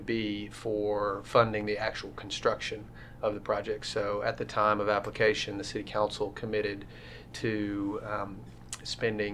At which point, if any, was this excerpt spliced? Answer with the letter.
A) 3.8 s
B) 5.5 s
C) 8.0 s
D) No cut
D